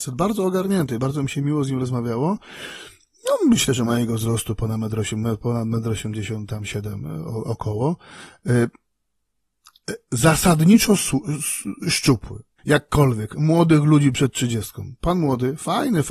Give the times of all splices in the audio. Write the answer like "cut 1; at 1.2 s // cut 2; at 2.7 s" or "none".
cut 1; at 12.6 s